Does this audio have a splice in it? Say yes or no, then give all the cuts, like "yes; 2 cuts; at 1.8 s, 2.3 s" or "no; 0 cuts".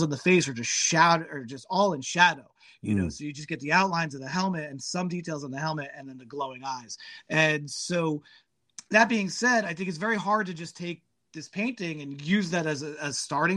no; 0 cuts